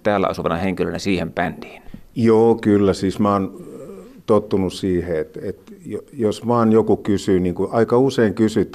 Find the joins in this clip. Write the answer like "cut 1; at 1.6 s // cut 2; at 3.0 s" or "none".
cut 1; at 5.4 s

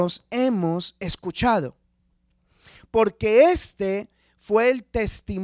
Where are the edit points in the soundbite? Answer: none

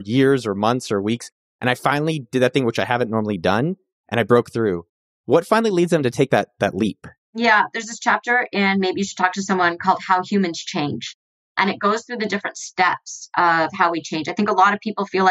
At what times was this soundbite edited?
none

